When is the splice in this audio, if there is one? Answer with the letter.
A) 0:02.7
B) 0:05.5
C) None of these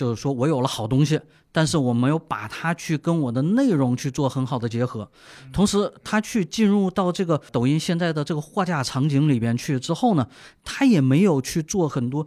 C